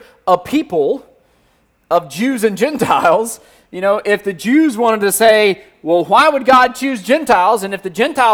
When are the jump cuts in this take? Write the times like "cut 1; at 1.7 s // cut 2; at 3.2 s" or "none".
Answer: none